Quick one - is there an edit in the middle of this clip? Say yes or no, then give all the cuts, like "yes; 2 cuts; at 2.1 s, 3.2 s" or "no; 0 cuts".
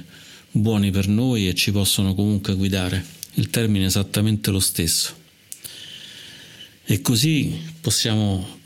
yes; 1 cut; at 3.3 s